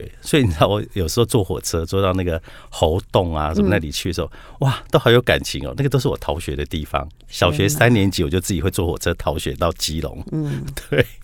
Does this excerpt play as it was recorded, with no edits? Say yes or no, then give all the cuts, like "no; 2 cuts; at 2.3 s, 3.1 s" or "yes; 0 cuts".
yes; 0 cuts